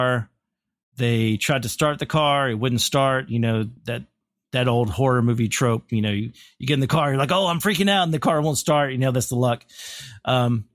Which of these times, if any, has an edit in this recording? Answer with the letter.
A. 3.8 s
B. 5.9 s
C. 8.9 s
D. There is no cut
A